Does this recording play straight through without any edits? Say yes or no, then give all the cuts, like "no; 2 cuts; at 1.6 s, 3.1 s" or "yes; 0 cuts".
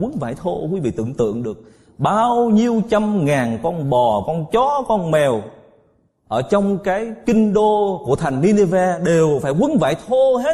yes; 0 cuts